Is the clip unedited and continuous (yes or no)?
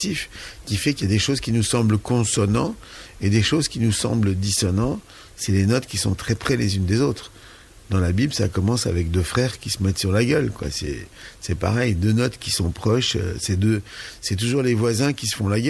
yes